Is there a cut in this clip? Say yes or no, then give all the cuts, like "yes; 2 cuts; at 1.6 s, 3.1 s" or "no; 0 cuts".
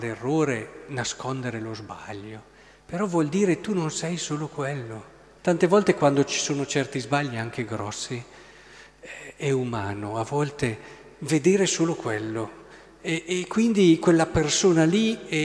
yes; 1 cut; at 5.4 s